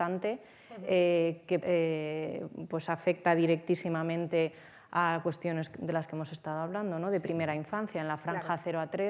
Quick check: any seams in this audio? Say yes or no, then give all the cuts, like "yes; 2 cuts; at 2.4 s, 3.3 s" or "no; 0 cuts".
yes; 1 cut; at 1.6 s